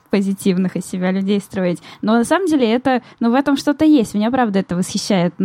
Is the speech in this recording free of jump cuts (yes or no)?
yes